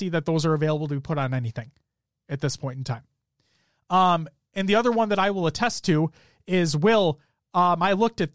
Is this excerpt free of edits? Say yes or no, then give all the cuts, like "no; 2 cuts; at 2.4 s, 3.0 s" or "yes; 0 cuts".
yes; 0 cuts